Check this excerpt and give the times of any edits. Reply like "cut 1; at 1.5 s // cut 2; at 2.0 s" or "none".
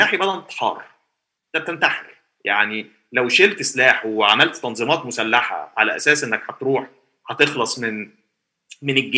none